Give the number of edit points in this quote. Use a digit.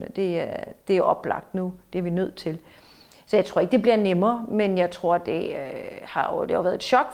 0